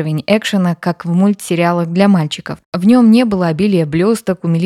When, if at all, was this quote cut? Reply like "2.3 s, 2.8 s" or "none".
2.6 s